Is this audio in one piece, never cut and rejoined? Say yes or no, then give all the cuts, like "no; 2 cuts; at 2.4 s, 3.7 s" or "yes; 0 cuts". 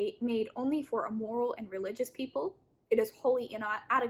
yes; 0 cuts